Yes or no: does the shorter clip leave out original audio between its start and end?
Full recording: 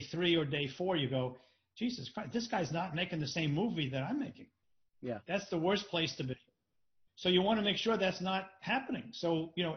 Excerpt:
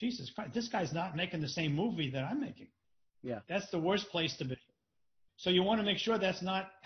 no